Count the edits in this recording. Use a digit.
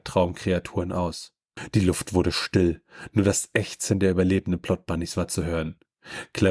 0